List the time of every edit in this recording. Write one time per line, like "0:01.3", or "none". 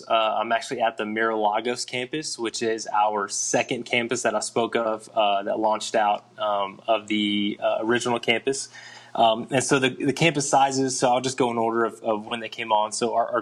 none

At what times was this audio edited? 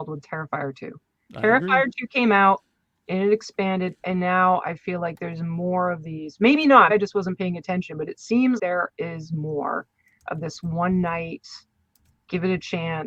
0:06.9
0:08.6

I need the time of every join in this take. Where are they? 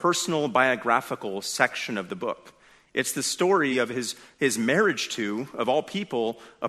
0:03.7

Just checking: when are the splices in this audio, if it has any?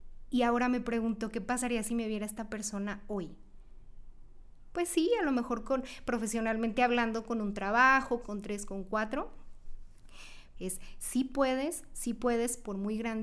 0:08.2
0:10.5

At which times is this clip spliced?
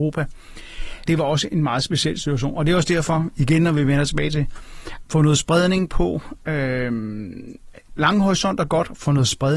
0:01.1
0:05.0

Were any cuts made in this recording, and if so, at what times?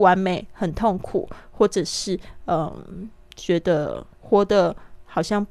0:04.1

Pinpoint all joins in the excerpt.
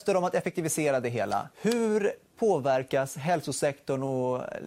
0:01.5

